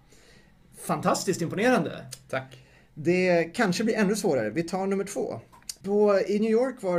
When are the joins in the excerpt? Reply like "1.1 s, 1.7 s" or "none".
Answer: 5.8 s